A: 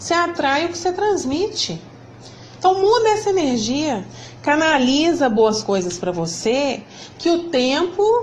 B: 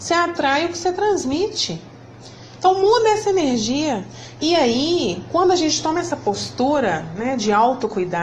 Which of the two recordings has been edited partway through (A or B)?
B